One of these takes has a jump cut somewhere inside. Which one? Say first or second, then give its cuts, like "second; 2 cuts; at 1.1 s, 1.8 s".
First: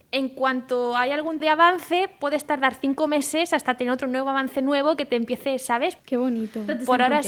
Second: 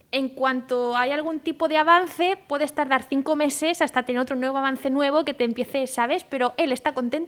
first; 2 cuts; at 1.4 s, 6.0 s